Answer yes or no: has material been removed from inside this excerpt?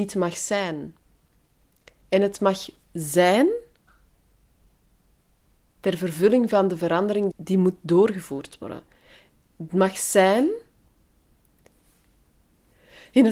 yes